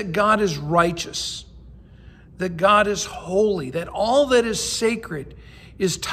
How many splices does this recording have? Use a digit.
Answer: 0